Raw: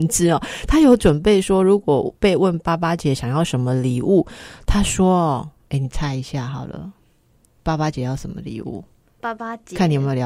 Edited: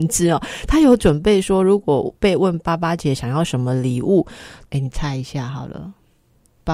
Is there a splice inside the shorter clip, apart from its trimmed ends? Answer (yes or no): yes